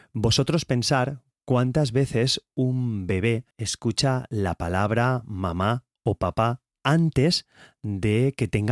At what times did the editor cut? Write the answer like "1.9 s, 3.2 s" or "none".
3.5 s